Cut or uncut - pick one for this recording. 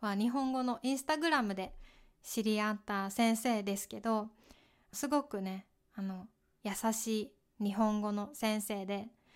cut